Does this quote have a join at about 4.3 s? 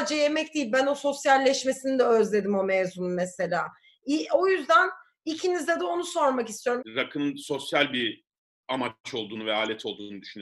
no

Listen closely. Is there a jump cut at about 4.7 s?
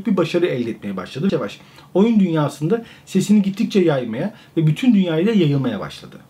no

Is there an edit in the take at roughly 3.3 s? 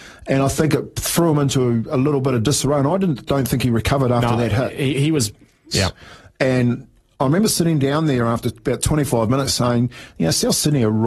no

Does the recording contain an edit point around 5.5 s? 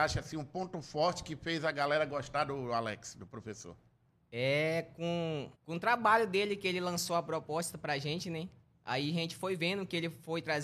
yes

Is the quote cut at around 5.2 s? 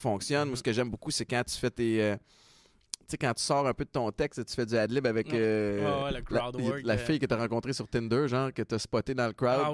no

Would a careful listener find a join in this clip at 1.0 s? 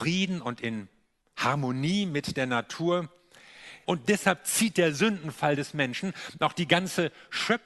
no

